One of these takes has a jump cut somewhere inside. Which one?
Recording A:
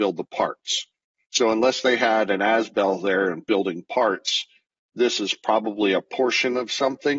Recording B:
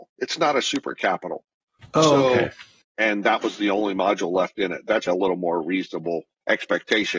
B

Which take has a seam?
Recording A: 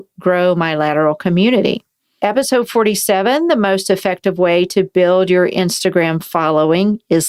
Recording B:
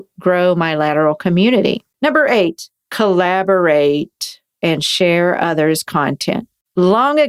B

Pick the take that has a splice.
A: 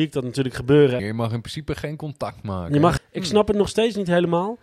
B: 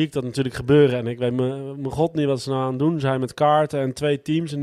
A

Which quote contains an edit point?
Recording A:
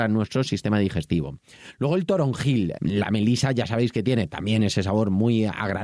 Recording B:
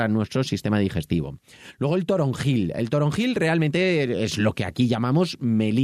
A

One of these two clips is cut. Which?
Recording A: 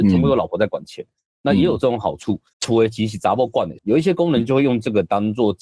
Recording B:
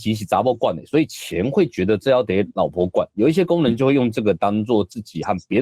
A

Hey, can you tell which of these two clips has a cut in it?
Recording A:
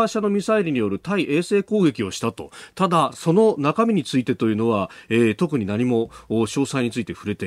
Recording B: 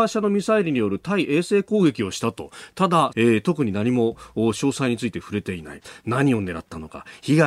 B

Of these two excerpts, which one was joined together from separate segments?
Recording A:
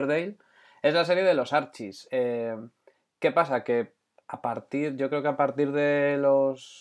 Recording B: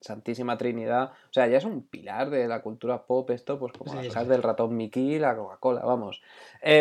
B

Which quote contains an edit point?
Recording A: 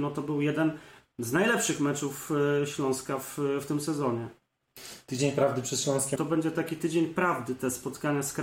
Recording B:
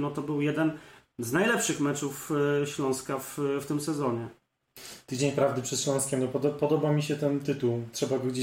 A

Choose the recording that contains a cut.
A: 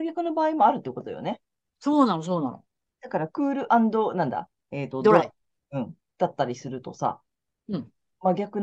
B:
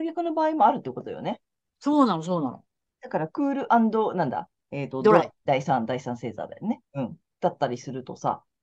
B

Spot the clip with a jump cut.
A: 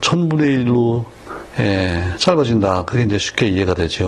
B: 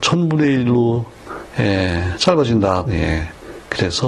B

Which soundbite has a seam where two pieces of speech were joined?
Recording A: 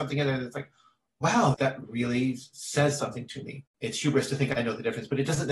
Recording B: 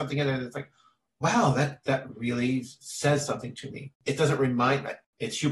A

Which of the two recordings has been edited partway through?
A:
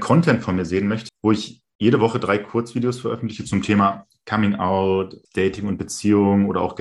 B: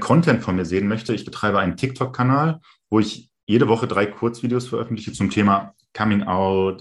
A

